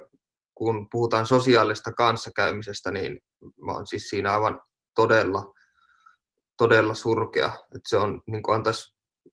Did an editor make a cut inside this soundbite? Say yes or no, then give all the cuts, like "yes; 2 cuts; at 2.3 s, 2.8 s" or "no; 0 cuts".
no; 0 cuts